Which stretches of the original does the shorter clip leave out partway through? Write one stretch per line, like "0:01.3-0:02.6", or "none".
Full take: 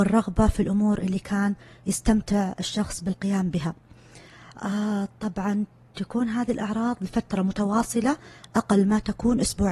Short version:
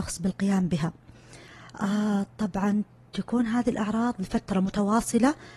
none